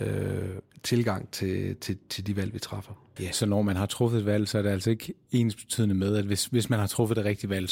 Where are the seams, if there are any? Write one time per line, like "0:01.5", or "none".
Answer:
0:03.2